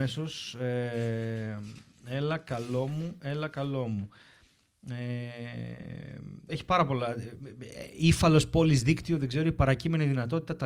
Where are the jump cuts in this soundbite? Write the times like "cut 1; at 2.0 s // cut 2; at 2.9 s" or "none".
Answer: cut 1; at 6.5 s